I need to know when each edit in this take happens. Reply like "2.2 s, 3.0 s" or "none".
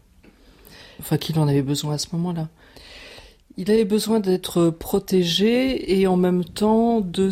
1.0 s